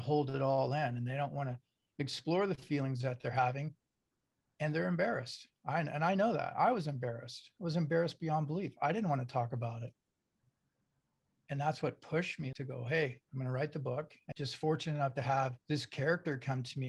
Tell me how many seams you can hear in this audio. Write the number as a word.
three